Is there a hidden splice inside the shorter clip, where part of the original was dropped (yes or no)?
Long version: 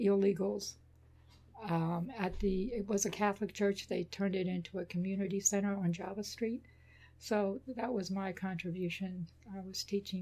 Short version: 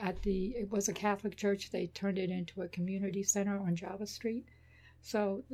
no